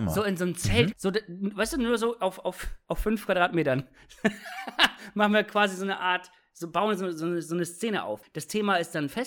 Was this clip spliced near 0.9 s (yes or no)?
yes